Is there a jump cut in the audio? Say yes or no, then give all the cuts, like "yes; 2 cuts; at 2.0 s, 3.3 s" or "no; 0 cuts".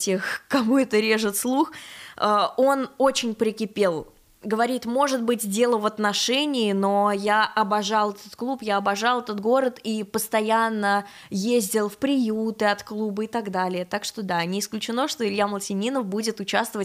no; 0 cuts